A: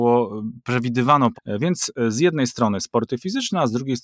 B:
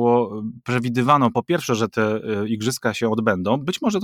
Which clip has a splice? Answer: A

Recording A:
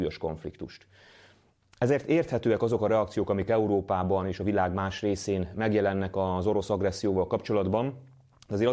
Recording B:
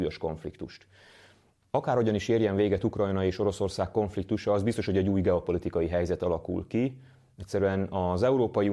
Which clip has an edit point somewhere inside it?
B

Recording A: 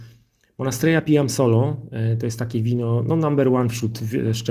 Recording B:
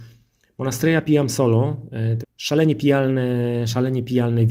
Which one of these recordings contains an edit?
B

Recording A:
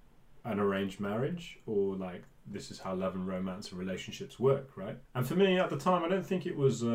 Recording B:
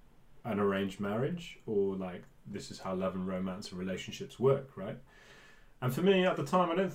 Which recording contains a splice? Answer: A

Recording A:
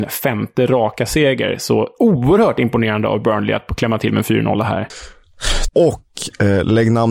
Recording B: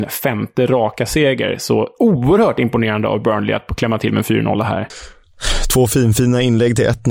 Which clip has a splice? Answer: A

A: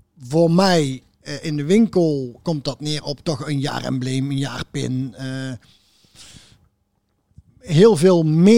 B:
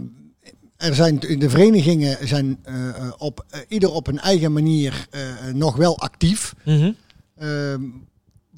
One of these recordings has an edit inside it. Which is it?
A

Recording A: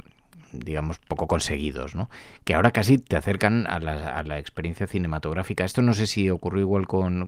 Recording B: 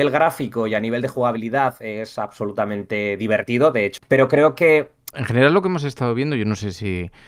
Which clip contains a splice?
B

